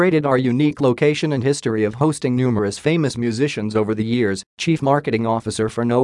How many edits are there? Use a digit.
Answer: 1